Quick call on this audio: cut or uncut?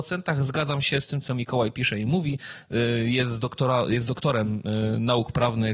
uncut